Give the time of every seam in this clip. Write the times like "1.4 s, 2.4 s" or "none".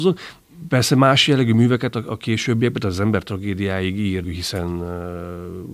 4.2 s